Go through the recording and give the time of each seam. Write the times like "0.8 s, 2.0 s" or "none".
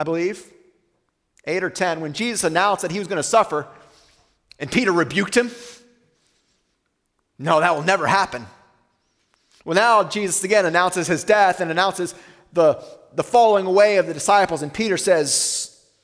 none